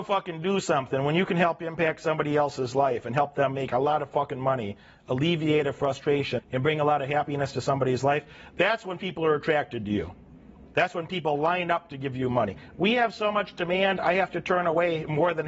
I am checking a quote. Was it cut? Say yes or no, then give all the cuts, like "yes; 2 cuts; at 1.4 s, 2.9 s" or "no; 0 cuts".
yes; 1 cut; at 6.4 s